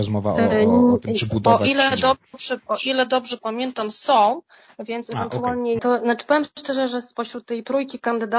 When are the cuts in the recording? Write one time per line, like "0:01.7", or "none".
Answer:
0:05.8